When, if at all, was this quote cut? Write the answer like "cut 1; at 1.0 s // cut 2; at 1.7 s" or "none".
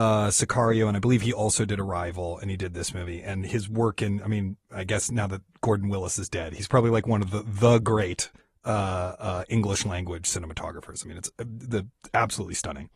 none